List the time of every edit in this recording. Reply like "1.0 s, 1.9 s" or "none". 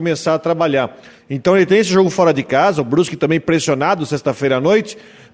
1.2 s

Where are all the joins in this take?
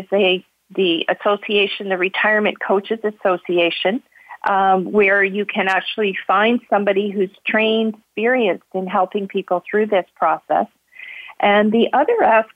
8.0 s

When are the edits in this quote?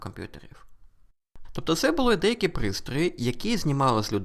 1.4 s

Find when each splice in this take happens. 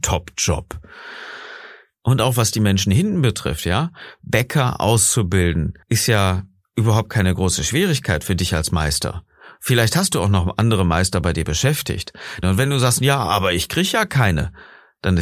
5.8 s, 12.4 s

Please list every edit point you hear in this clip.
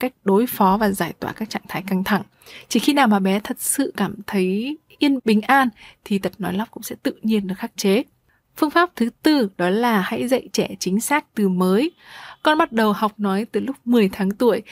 5.2 s

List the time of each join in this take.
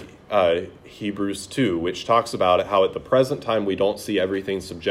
none

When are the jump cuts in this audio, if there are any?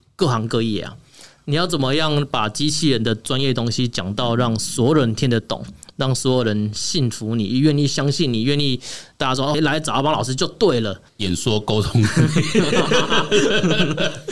9.5 s, 11.1 s

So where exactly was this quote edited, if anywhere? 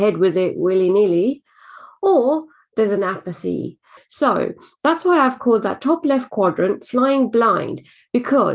4.0 s

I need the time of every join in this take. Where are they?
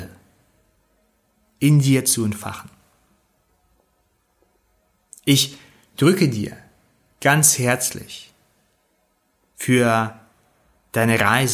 none

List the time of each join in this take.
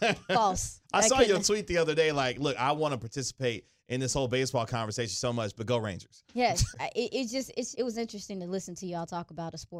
6.7 s, 7.7 s

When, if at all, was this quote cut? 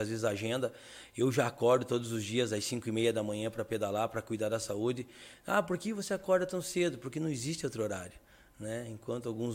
none

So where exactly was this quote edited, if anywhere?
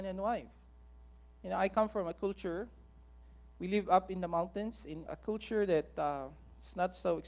5.1 s

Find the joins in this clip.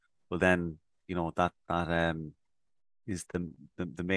1.6 s, 3.2 s

